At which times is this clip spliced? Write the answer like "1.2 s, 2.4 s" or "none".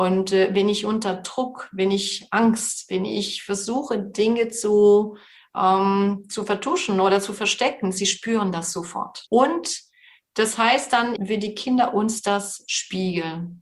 9.3 s, 11.2 s